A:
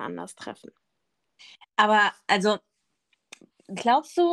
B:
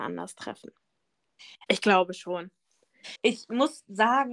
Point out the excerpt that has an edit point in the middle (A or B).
B